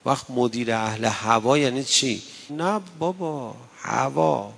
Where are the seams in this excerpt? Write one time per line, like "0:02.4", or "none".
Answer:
0:02.5